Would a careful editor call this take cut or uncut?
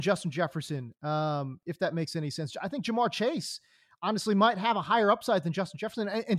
uncut